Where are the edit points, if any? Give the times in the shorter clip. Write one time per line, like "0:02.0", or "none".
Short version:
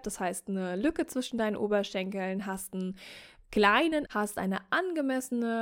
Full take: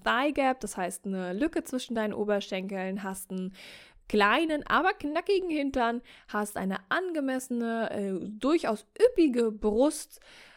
0:04.1